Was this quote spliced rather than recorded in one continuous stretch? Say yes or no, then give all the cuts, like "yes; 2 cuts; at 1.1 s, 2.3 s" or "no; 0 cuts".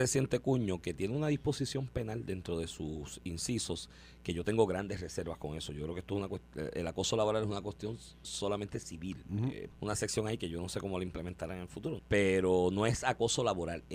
yes; 2 cuts; at 9.7 s, 12.0 s